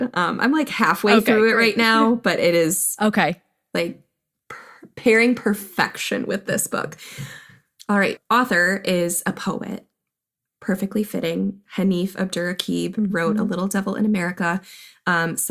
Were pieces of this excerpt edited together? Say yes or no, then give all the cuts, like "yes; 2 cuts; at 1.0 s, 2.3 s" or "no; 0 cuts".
yes; 1 cut; at 8.2 s